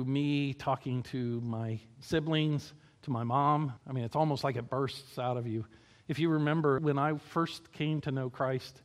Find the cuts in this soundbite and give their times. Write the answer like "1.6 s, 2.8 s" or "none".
3.8 s, 6.8 s